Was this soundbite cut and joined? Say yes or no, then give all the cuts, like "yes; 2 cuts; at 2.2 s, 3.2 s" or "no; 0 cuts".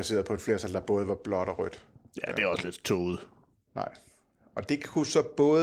yes; 1 cut; at 3.7 s